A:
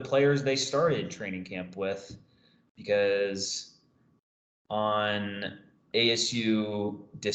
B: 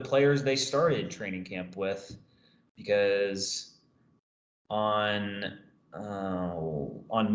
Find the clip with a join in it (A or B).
A